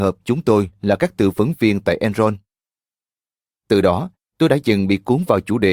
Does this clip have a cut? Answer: no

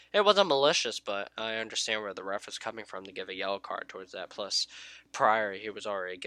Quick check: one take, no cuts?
yes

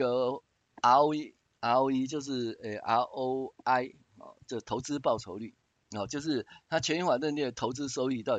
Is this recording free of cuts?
yes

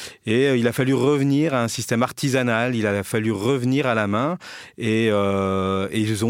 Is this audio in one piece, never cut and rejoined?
yes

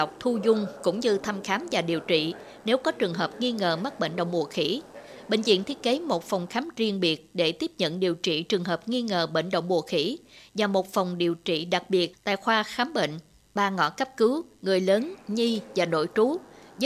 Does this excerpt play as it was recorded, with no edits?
yes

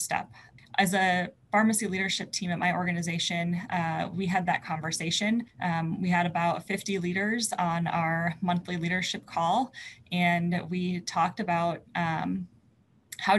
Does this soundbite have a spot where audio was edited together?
no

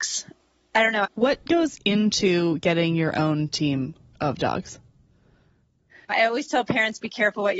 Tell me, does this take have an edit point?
yes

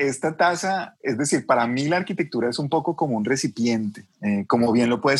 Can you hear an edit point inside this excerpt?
no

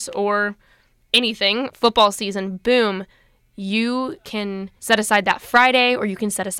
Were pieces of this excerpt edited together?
yes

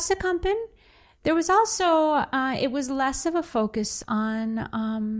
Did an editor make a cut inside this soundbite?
no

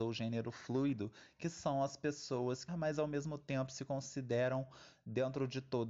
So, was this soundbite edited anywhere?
yes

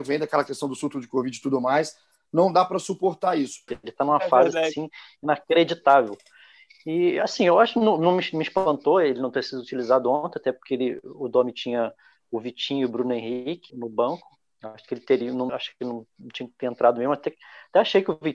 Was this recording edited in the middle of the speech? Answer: yes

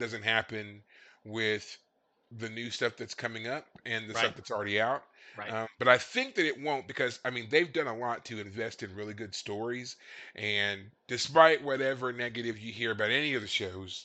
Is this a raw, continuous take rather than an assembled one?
yes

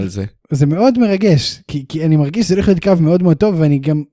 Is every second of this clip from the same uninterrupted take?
yes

